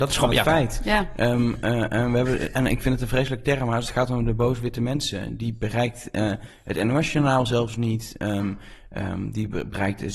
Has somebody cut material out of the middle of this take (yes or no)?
no